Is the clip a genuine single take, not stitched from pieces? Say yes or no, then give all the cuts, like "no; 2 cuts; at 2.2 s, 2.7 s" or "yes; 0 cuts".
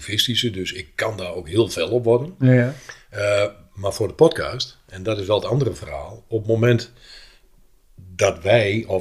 yes; 0 cuts